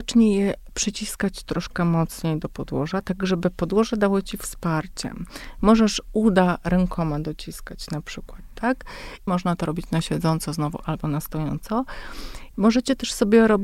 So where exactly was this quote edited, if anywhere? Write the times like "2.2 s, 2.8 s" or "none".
9.3 s, 12.5 s